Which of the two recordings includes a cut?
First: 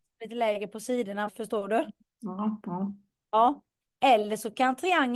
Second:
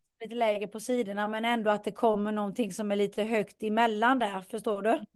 first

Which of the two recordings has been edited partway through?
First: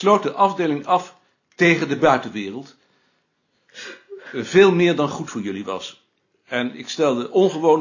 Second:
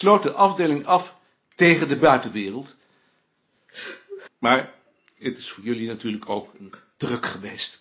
second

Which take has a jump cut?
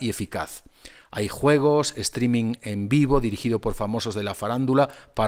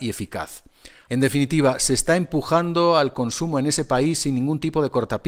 second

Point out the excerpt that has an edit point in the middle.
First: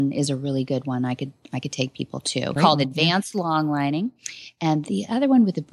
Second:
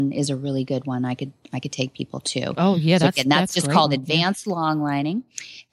first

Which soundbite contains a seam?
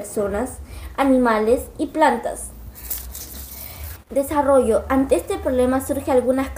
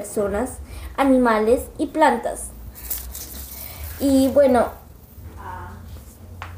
first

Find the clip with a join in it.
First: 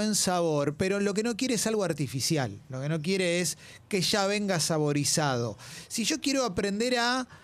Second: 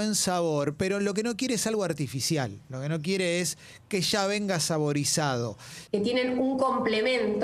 second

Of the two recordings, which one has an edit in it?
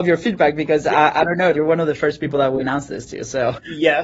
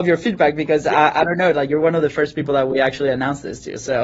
first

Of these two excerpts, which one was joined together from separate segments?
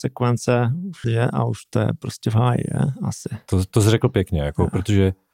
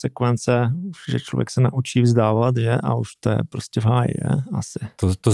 first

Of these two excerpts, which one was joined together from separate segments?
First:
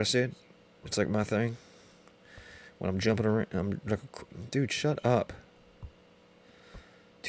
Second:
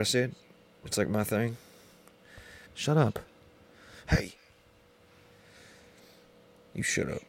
second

